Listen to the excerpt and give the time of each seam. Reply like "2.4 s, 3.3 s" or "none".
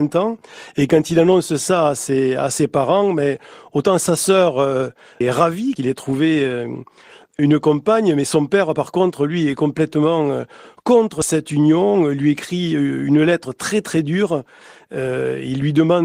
none